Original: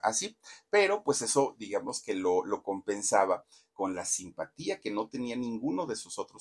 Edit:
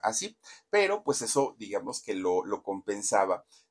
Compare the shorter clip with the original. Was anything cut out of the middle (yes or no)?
no